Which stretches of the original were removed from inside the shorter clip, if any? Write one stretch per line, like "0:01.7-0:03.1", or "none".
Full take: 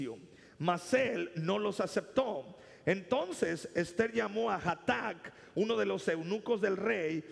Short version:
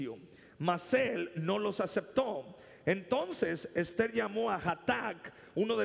none

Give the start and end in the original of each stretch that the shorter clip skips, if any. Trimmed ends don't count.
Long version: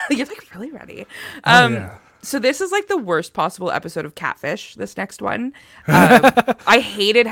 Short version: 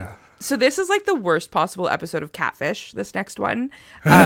none

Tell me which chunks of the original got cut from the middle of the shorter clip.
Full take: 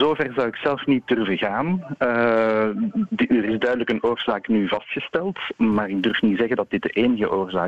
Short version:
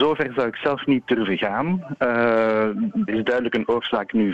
0:03.1-0:03.4

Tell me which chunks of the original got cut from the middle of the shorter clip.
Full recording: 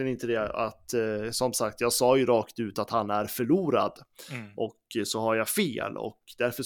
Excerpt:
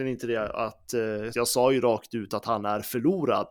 0:01.3-0:01.8

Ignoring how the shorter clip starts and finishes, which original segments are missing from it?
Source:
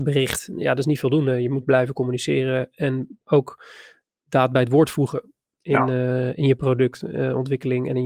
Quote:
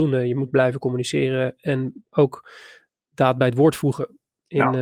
none

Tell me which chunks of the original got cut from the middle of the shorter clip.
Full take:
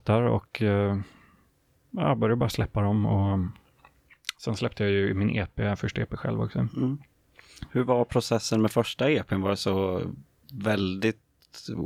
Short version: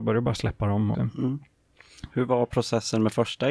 0:03.1-0:06.5

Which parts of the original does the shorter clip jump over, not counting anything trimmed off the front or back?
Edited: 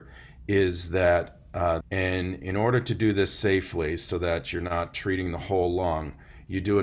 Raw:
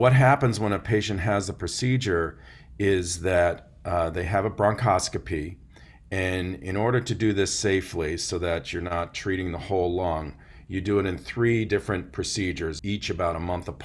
0:04.1-0:06.0

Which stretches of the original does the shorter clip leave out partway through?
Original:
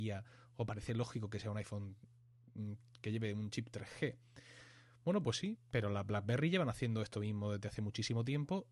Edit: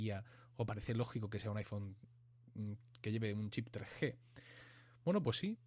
none

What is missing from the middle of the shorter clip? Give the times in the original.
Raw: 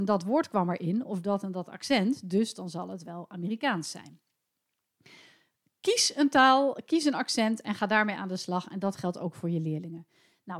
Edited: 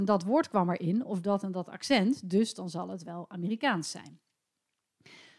none

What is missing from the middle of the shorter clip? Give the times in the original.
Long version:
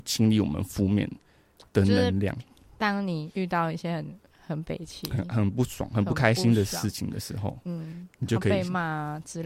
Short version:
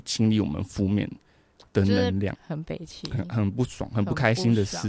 0:02.3-0:04.3

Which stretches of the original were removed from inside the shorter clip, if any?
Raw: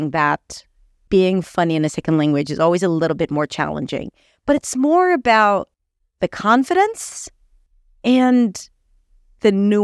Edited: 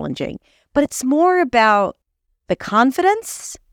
none

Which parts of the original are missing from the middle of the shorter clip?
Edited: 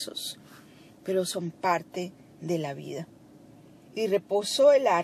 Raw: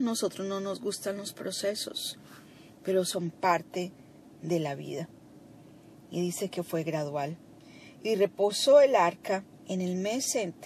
0:04.1-0:04.3
0:05.9-0:07.9

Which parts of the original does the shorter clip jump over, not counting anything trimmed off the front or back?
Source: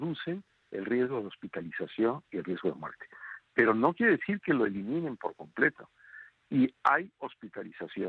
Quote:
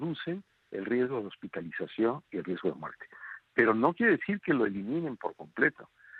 none

